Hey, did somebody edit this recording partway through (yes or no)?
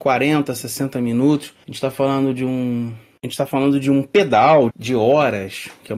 yes